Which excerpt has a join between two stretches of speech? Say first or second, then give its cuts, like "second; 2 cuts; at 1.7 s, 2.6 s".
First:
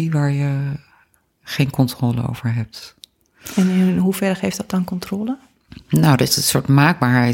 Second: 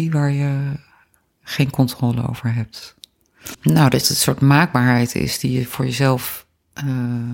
second; 1 cut; at 3.5 s